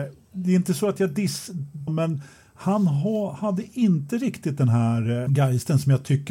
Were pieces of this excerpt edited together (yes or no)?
yes